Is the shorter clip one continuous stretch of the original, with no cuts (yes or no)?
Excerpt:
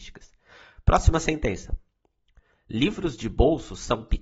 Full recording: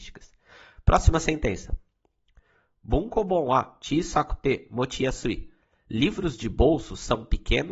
no